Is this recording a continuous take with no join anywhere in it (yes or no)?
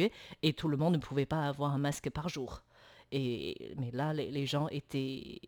yes